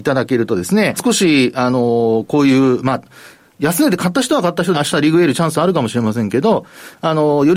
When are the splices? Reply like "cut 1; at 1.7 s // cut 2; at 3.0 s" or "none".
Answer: cut 1; at 1.0 s // cut 2; at 4.7 s